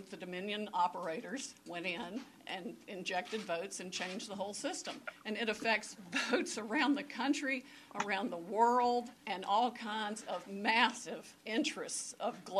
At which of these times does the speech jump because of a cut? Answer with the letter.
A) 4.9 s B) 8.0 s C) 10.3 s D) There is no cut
D